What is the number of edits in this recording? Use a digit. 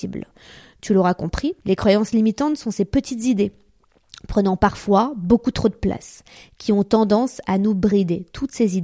1